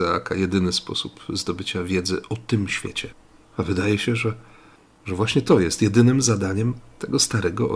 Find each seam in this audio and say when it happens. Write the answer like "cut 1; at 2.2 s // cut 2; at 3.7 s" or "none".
cut 1; at 3.4 s